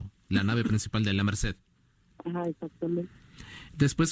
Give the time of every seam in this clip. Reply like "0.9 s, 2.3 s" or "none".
none